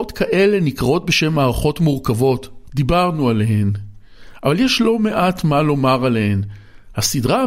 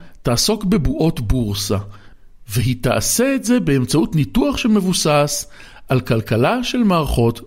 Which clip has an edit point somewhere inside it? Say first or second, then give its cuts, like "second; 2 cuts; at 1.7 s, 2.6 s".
first; 1 cut; at 2.7 s